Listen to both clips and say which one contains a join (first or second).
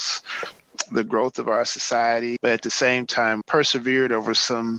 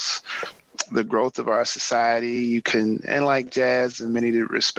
first